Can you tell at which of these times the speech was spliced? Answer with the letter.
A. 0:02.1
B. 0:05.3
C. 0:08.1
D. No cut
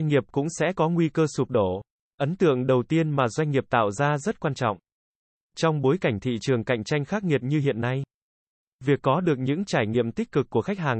B